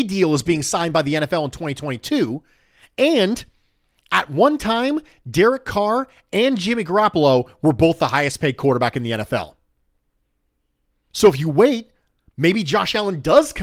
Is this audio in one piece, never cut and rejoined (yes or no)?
yes